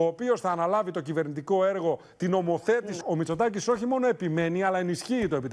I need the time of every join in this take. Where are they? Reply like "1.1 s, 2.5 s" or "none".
3.0 s

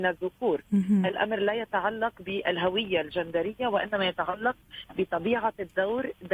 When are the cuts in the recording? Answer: none

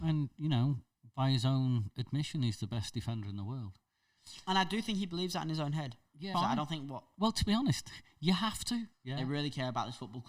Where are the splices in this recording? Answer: 6.3 s, 8.9 s

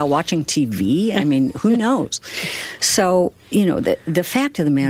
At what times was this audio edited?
none

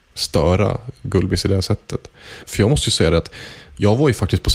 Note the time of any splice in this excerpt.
2.4 s

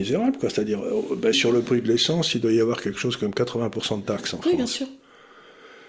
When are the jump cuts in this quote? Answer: 1.3 s

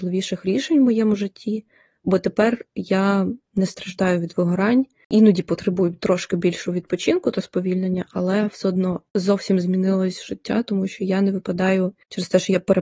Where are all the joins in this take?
none

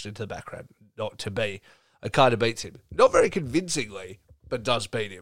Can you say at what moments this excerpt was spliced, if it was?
none

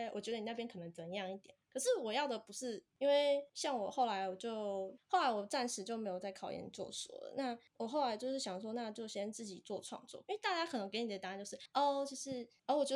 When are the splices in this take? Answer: 3.0 s, 10.2 s

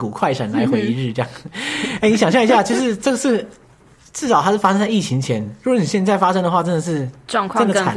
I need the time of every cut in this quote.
none

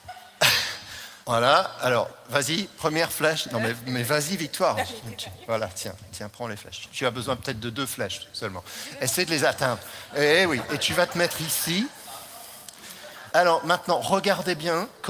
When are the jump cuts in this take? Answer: 1.2 s, 10.1 s, 13.3 s

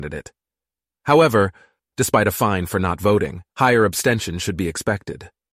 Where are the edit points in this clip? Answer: 1.8 s, 3.5 s

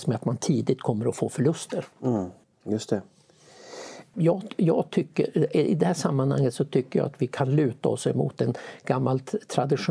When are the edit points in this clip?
2.4 s, 4.1 s

